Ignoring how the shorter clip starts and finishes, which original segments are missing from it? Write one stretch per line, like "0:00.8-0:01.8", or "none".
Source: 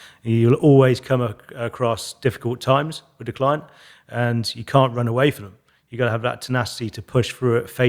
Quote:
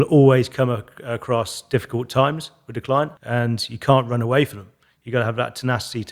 0:03.7-0:04.0